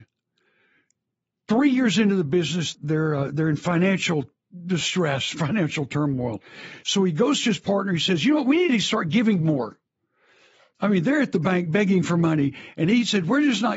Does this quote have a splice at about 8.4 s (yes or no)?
no